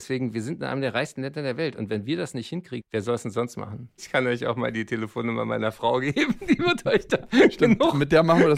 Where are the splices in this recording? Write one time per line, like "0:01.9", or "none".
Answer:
0:02.8
0:04.0

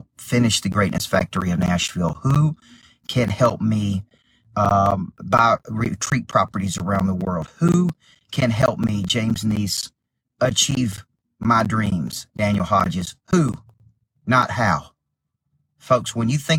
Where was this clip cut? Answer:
none

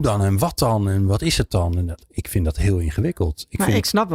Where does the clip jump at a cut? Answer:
none

